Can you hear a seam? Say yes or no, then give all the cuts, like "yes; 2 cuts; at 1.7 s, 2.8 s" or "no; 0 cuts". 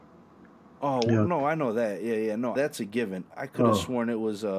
yes; 1 cut; at 2.6 s